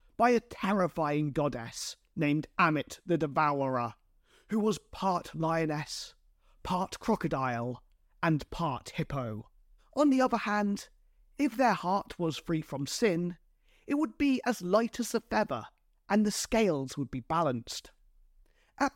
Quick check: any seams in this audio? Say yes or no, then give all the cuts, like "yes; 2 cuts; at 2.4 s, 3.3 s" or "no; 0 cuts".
yes; 1 cut; at 9.8 s